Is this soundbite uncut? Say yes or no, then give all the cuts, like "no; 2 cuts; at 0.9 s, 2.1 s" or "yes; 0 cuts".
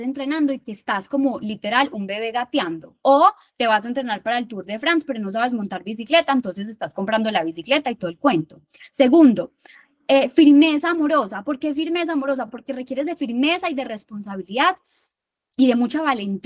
yes; 0 cuts